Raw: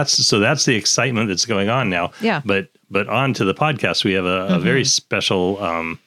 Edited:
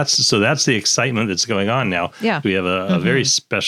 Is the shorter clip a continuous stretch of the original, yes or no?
no